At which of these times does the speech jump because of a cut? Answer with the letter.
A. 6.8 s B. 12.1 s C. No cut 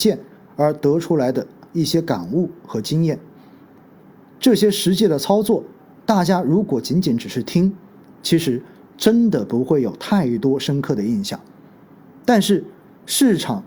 C